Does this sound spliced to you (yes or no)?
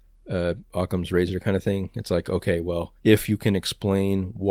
yes